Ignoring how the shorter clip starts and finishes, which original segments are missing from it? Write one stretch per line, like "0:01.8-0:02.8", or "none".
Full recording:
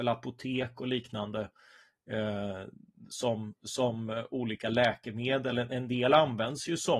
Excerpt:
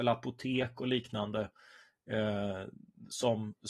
none